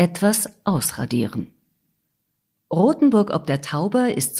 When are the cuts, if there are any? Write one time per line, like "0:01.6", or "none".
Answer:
none